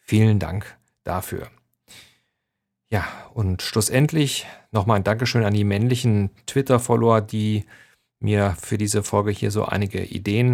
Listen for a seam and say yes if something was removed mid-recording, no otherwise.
no